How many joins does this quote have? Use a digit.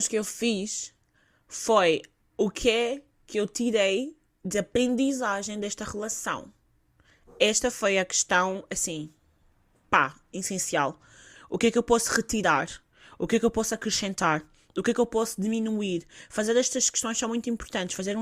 1